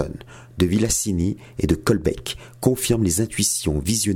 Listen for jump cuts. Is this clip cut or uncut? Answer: uncut